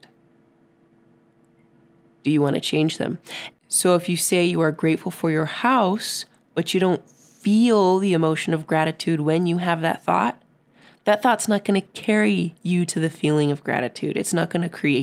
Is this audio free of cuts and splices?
no; 1 cut; at 3.5 s

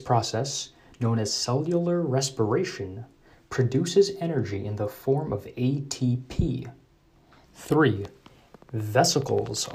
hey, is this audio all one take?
no; 1 cut; at 7.4 s

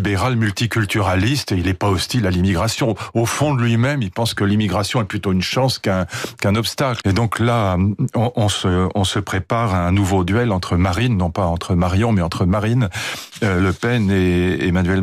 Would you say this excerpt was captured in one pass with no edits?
no; 1 cut; at 7.0 s

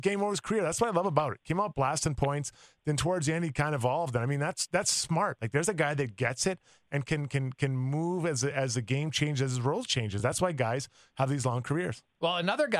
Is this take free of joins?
yes; 0 cuts

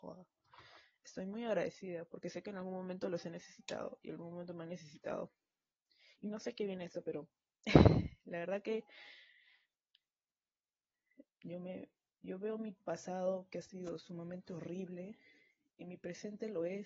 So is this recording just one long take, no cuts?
no; 2 cuts; at 6.2 s, 11.3 s

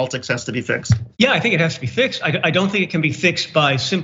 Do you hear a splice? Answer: yes; 1 cut; at 1.1 s

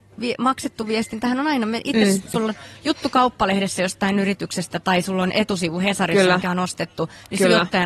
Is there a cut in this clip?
yes; 1 cut; at 2.3 s

